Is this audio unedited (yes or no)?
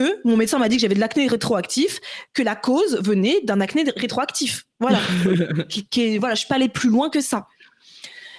yes